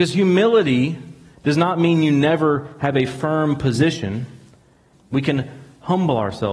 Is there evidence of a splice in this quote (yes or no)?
yes